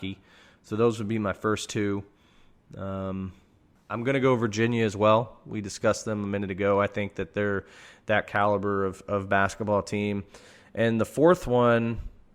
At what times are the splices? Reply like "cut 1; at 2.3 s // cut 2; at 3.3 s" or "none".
none